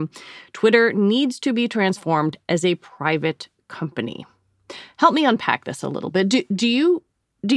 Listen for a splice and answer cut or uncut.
uncut